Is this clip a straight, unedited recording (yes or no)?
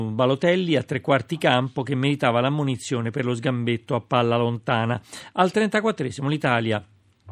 yes